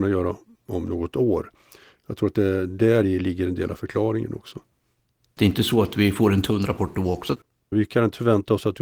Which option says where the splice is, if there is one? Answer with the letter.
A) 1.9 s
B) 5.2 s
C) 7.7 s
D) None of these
C